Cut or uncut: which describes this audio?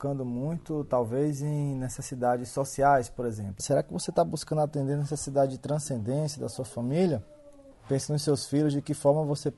cut